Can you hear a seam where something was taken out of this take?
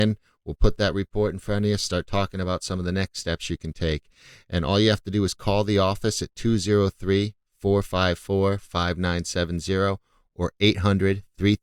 no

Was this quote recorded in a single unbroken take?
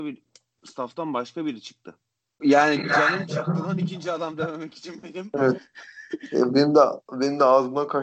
no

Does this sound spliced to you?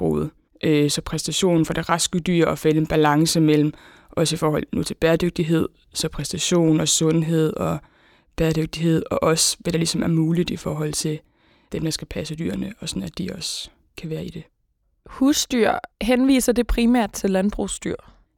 no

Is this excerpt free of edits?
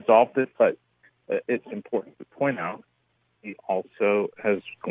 yes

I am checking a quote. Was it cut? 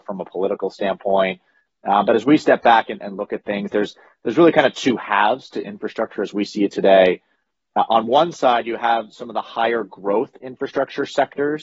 no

